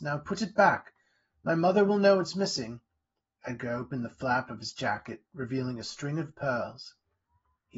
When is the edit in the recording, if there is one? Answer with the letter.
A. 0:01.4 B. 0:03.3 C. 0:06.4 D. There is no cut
B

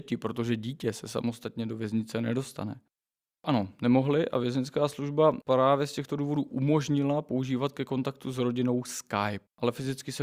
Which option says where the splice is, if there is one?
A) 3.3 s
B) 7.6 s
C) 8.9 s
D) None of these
A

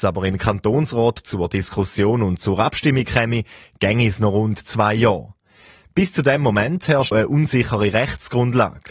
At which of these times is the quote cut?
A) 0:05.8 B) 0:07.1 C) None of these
B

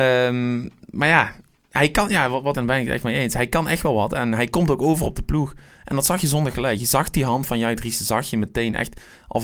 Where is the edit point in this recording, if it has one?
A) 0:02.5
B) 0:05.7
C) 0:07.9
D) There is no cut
A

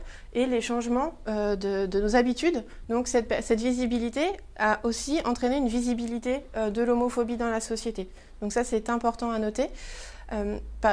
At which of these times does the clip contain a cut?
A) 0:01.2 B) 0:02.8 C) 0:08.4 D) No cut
B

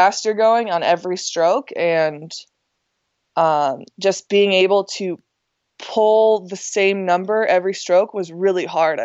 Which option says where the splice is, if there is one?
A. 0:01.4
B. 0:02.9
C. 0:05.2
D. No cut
D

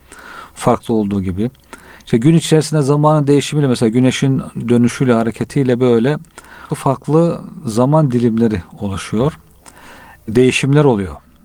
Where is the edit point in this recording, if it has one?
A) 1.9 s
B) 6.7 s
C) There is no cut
B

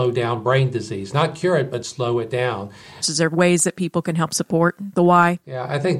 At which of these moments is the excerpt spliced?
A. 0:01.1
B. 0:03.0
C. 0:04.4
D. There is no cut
B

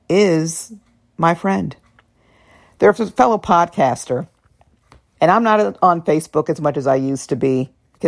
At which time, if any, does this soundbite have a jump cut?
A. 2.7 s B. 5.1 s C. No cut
B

